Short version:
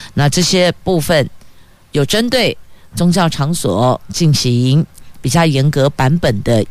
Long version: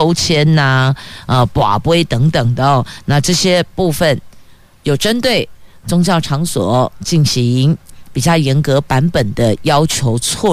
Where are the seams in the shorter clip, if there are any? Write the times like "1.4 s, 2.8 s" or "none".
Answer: none